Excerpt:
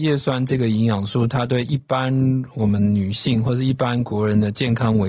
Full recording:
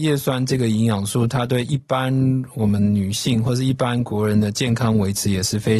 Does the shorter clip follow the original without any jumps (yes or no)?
yes